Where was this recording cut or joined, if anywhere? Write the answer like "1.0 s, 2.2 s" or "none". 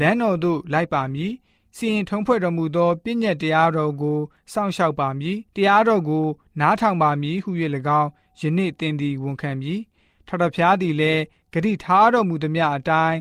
5.5 s